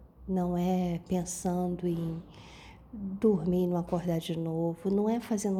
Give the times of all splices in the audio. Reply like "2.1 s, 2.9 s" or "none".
none